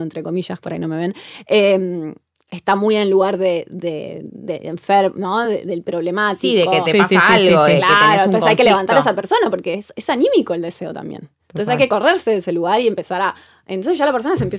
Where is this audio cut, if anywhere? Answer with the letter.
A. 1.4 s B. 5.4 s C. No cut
C